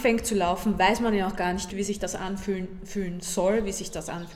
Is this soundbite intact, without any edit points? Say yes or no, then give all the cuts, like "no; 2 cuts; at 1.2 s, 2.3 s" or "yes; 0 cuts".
no; 1 cut; at 1.7 s